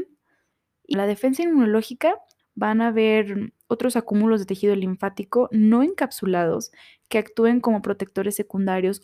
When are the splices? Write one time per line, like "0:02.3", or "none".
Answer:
0:00.9
0:02.4